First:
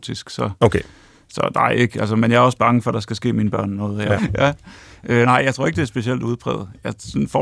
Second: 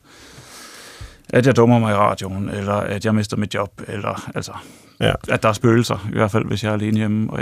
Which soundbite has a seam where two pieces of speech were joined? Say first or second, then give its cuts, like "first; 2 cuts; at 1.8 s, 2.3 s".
first; 1 cut; at 4.2 s